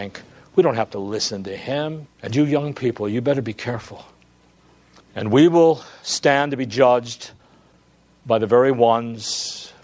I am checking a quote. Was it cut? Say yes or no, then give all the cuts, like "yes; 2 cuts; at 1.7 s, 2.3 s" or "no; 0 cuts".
yes; 2 cuts; at 2.1 s, 5.0 s